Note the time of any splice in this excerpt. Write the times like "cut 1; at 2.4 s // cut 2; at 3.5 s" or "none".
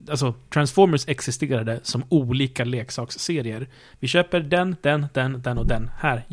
cut 1; at 3.9 s